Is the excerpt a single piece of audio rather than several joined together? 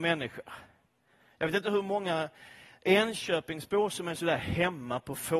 yes; 0 cuts

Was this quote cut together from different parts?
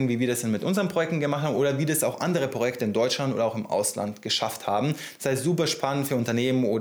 no; 0 cuts

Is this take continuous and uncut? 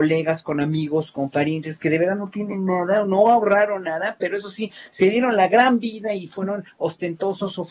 yes; 0 cuts

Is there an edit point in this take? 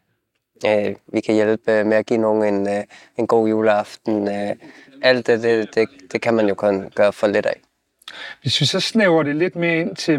no; 0 cuts

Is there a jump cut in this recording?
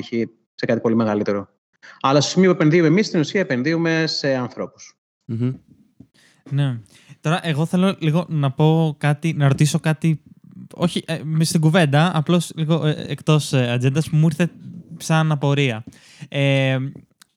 no; 0 cuts

